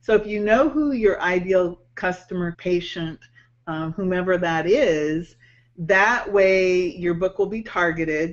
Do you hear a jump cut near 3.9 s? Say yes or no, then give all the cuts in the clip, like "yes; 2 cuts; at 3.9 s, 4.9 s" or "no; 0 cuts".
no; 1 cut; at 2.5 s